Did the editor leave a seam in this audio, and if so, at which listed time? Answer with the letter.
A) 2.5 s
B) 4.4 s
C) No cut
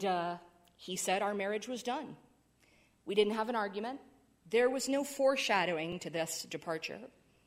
C